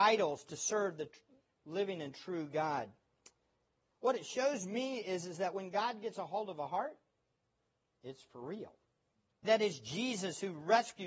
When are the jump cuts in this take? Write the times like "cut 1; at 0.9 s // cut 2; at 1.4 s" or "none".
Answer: cut 1; at 3.9 s // cut 2; at 9.4 s

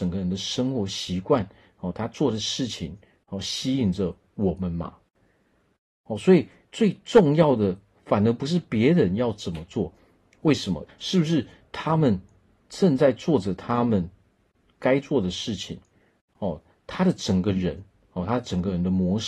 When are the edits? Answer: cut 1; at 10.9 s

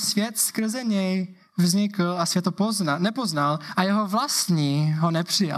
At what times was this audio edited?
cut 1; at 3.7 s

